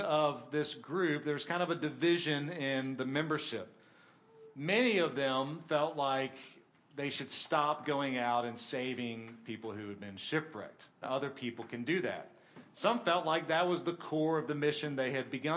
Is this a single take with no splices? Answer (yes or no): no